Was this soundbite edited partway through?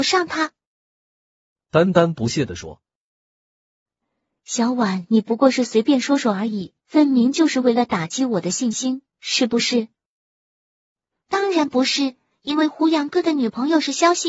yes; 1 cut; at 6.8 s

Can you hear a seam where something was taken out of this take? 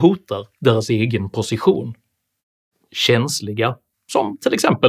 yes; 1 cut; at 3.9 s

